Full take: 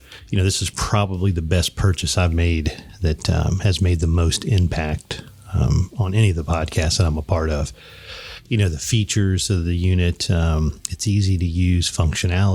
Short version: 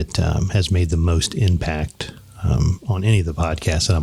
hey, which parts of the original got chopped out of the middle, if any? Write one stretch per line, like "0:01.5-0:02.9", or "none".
none